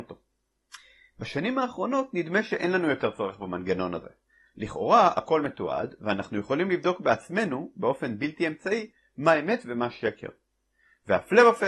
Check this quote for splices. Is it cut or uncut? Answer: uncut